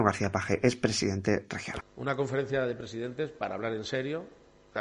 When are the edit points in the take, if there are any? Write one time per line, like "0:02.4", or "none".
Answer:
0:01.8